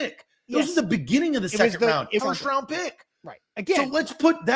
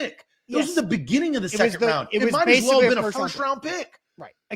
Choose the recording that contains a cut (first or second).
first